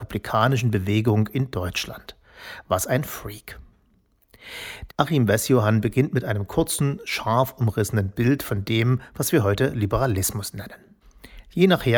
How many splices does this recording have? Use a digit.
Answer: 1